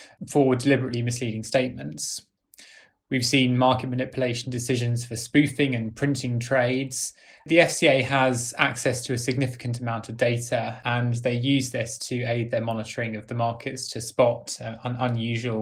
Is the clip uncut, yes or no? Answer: yes